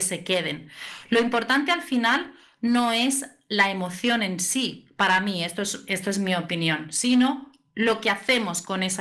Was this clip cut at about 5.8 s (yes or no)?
no